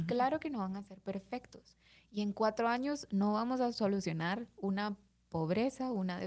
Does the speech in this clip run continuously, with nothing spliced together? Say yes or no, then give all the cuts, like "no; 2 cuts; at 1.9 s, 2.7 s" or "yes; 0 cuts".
yes; 0 cuts